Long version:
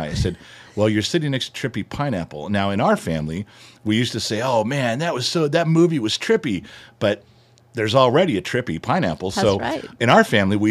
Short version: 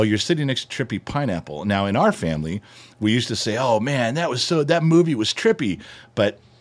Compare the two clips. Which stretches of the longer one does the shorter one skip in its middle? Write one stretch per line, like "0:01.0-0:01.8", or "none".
none